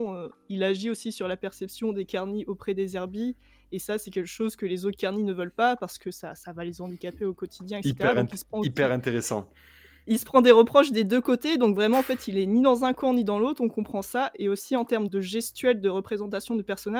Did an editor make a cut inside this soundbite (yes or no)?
yes